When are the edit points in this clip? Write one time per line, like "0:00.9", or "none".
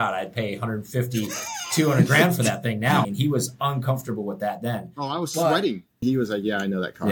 0:03.0
0:06.0